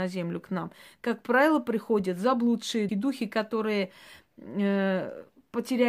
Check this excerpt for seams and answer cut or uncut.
cut